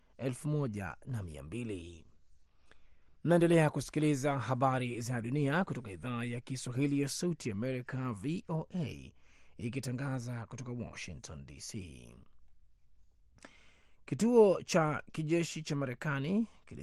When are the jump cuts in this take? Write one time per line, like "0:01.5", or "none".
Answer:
none